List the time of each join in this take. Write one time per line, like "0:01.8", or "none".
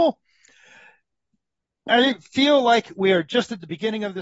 none